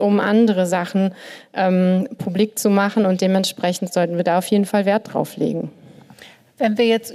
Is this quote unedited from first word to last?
yes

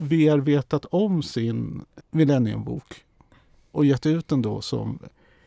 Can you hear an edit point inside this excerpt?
yes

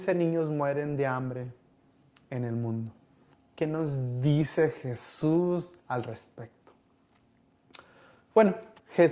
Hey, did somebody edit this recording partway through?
yes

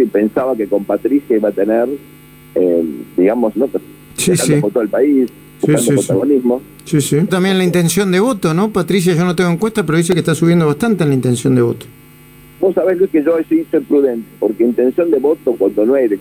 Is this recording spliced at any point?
yes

